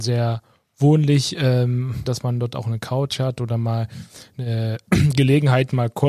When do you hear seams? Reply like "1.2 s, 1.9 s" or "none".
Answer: 2.0 s